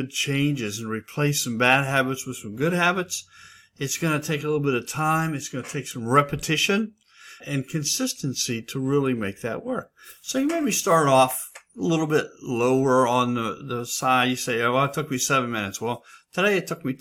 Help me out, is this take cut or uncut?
cut